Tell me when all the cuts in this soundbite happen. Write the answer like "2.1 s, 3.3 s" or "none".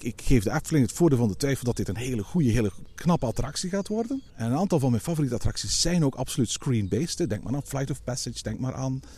4.3 s